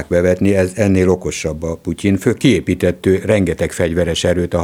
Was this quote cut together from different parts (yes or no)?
no